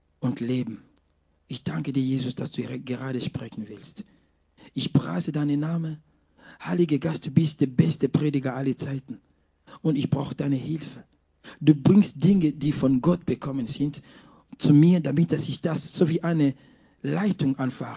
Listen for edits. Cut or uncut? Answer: uncut